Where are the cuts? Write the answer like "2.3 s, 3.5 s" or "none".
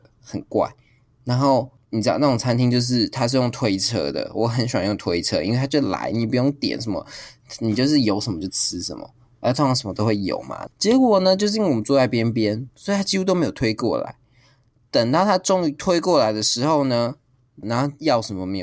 10.7 s, 17.6 s